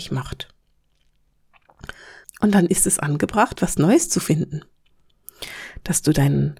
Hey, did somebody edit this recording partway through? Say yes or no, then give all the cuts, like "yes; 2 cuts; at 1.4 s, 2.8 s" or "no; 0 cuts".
yes; 2 cuts; at 2.2 s, 3.6 s